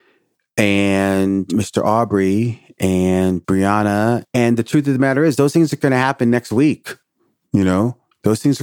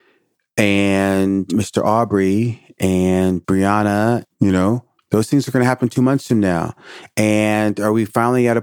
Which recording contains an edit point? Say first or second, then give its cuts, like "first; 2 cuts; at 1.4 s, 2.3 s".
second; 1 cut; at 4.3 s